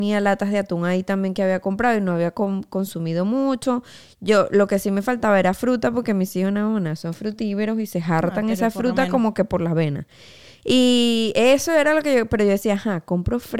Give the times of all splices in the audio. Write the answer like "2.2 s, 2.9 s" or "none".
none